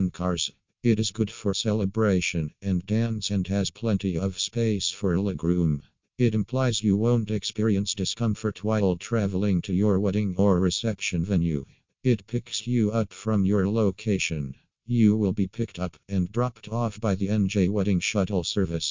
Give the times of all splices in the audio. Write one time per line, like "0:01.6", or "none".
0:16.0